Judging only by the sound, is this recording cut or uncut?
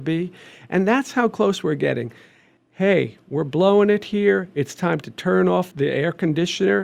cut